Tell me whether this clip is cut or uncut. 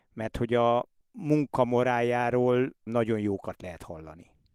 uncut